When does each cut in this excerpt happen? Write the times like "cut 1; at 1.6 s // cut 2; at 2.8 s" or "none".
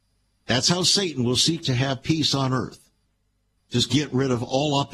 none

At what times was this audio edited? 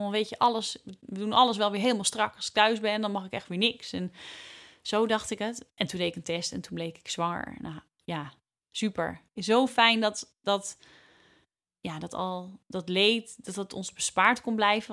cut 1; at 9.4 s

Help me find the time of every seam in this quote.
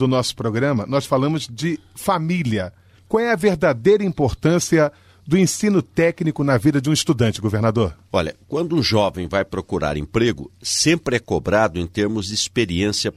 cut 1; at 2.9 s

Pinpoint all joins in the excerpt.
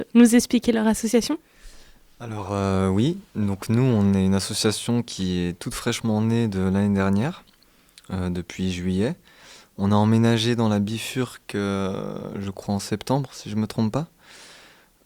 none

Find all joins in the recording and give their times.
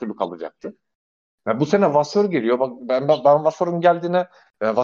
none

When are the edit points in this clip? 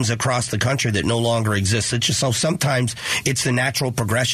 none

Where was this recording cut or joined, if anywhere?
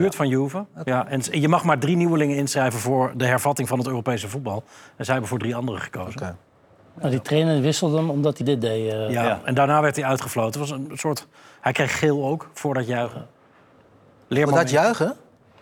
cut 1; at 8.4 s

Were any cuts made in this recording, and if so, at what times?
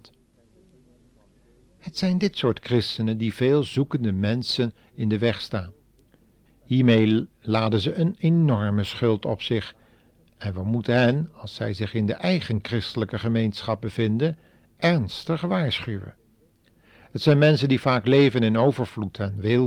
cut 1; at 6.5 s

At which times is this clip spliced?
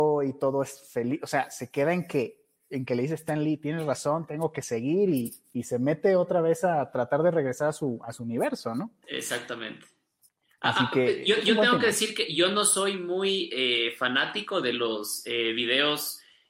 none

